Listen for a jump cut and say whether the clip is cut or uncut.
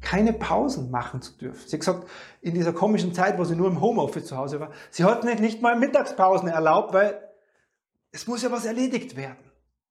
uncut